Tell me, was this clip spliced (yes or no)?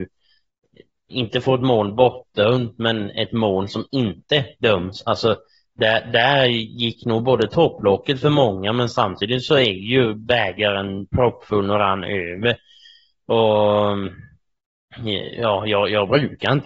no